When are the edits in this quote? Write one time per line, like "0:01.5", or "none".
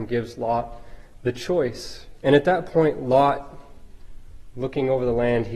0:02.2